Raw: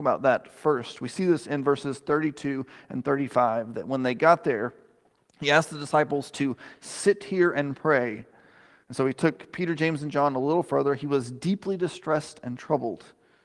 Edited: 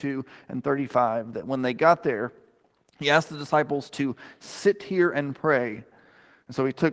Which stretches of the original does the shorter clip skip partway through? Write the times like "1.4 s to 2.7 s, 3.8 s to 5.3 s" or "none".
none